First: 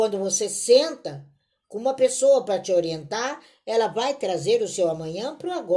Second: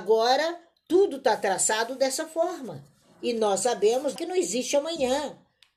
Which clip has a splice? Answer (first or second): second